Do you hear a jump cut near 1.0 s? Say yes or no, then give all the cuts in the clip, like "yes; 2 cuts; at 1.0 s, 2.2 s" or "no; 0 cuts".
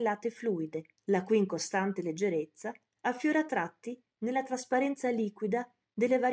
yes; 1 cut; at 1.0 s